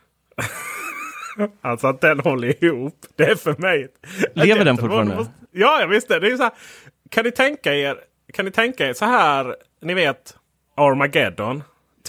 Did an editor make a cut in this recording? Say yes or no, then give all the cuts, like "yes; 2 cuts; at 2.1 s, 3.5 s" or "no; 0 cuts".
no; 0 cuts